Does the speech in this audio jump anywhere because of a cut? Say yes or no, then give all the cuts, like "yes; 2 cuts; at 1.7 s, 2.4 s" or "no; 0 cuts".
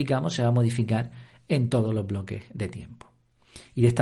no; 0 cuts